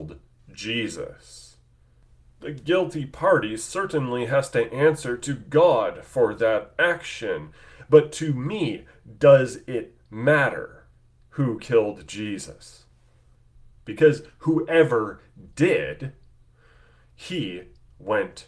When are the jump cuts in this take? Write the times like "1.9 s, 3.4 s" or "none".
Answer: none